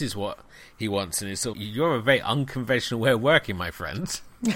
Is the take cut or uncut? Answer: cut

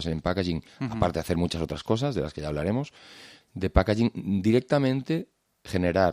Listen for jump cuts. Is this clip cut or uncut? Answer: cut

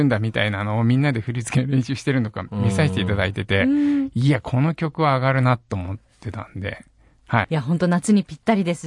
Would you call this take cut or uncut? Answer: cut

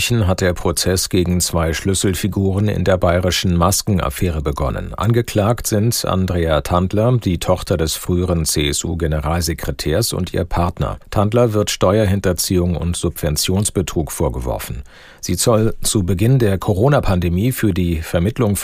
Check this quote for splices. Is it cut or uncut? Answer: cut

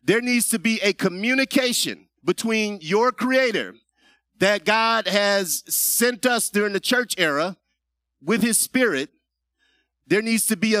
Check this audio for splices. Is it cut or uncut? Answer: cut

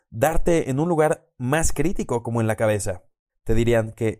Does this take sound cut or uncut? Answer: cut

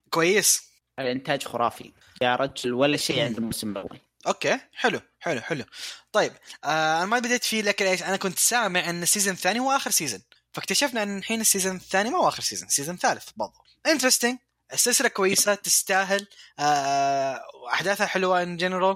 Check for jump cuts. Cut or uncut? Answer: uncut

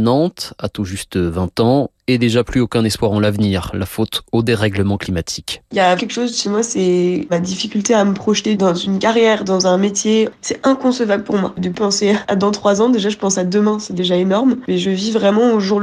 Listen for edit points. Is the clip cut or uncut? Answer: cut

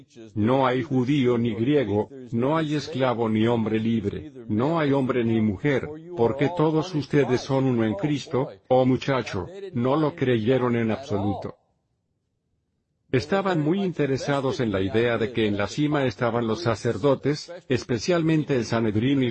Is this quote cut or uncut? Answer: uncut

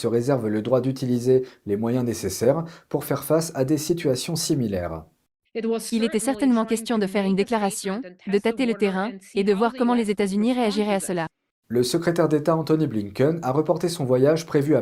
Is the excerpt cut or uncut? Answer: uncut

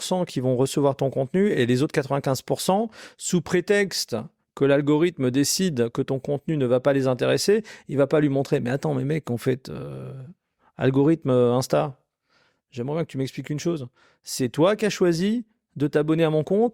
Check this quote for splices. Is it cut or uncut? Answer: uncut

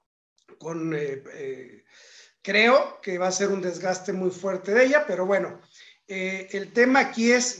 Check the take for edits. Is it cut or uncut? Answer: uncut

